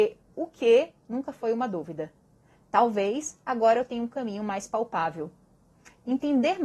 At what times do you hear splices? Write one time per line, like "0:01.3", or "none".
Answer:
none